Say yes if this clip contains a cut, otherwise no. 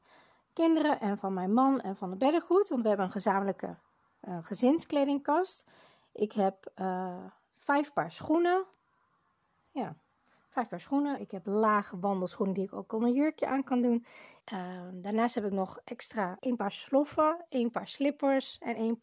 yes